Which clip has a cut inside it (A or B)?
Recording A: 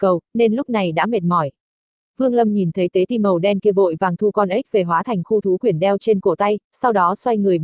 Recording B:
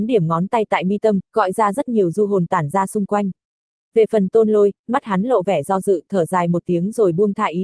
A